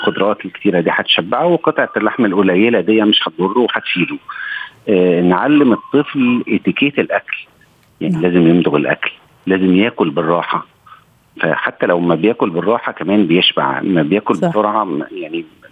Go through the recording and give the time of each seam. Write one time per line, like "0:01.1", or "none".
none